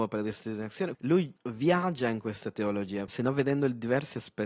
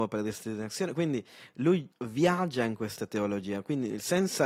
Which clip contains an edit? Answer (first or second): first